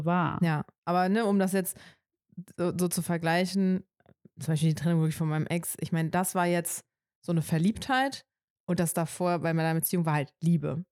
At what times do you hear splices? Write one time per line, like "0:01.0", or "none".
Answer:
none